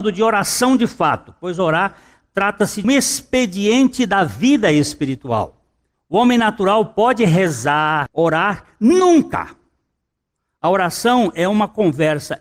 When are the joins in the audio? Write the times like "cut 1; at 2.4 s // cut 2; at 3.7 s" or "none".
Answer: cut 1; at 2.8 s // cut 2; at 5.9 s // cut 3; at 8.1 s